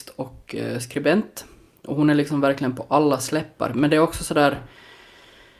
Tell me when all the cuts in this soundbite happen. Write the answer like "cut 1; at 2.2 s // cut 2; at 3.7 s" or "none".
none